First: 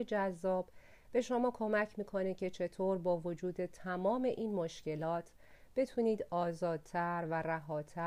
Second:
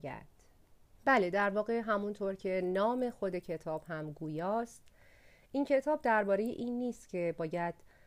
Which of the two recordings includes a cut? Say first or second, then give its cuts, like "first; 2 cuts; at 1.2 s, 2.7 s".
second; 1 cut; at 0.9 s